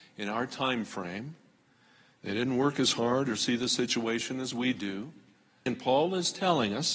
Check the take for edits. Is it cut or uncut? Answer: cut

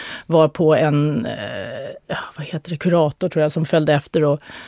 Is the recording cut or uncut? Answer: uncut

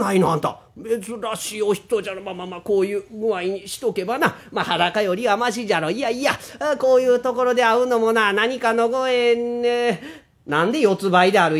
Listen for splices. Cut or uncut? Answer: uncut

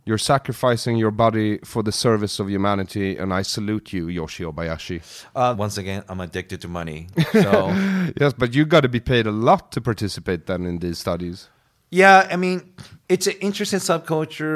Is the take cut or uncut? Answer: cut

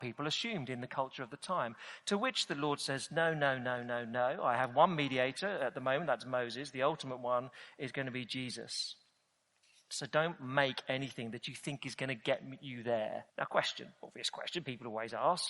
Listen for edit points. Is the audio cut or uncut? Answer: cut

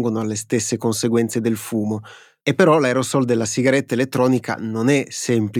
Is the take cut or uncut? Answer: uncut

